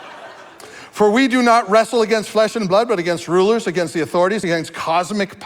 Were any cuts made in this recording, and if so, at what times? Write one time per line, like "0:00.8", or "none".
none